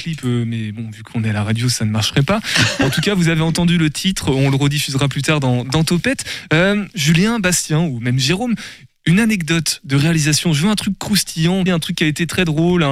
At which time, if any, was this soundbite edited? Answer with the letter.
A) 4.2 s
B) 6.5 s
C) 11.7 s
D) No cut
C